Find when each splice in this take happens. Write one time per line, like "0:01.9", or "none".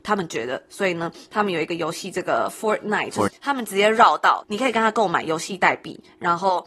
0:03.3
0:04.4